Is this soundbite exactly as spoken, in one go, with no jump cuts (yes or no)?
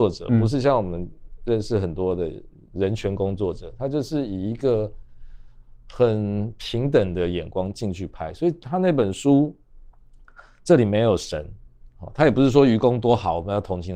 yes